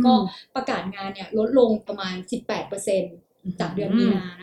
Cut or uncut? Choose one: cut